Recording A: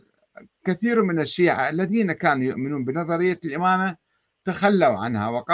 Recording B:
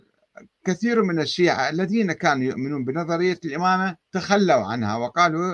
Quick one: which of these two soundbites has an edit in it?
B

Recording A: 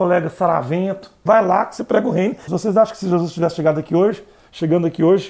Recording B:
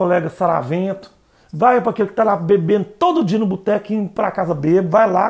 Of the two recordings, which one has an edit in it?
A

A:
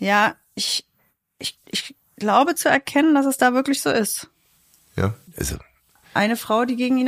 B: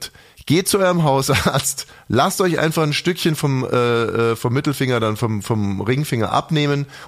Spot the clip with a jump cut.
A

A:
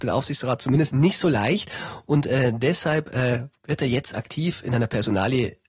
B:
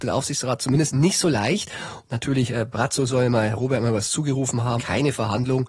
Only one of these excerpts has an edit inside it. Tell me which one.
B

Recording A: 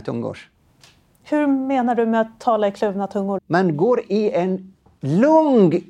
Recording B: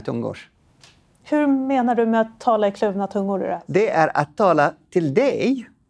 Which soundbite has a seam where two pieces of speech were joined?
A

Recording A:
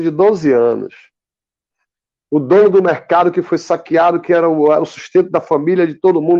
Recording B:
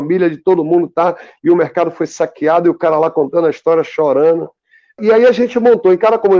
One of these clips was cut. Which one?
B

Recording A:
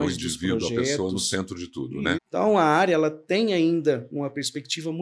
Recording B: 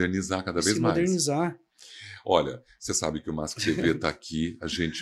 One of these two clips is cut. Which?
A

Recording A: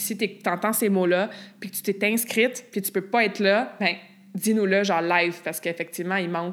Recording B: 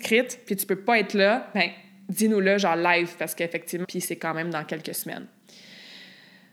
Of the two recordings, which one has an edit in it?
B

